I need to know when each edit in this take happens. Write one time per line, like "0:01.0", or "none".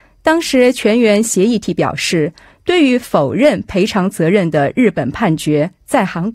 none